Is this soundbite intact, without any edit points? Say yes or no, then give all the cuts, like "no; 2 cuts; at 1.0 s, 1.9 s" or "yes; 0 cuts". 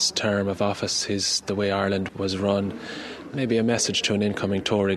no; 1 cut; at 2.1 s